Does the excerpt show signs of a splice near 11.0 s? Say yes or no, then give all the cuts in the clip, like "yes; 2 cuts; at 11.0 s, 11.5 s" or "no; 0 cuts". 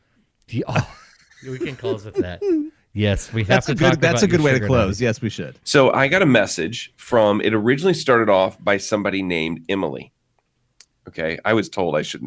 no; 1 cut; at 5.6 s